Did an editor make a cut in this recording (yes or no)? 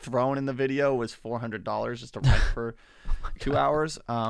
no